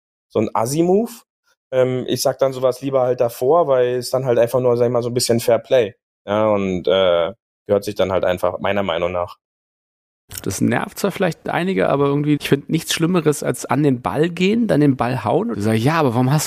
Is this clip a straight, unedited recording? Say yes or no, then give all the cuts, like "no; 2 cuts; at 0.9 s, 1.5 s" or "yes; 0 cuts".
no; 3 cuts; at 10.4 s, 12.4 s, 15.5 s